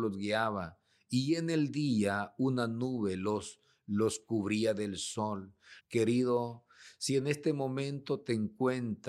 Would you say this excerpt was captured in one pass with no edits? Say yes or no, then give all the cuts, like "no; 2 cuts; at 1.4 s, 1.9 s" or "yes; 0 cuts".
no; 1 cut; at 5.8 s